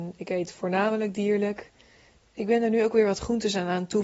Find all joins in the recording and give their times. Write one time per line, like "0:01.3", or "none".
0:02.2